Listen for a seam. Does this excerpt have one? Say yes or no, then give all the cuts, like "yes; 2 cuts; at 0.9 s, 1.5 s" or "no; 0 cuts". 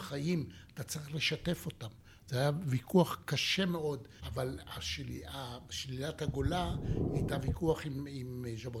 yes; 2 cuts; at 4.2 s, 5.7 s